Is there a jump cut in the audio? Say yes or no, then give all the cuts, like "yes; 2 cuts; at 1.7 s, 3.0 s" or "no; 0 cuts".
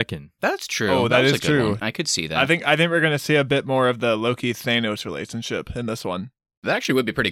yes; 1 cut; at 1.8 s